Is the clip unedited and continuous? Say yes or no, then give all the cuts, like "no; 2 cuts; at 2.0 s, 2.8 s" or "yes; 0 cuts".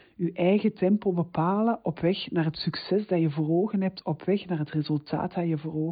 no; 1 cut; at 4.0 s